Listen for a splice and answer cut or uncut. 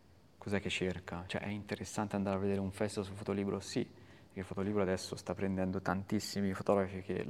cut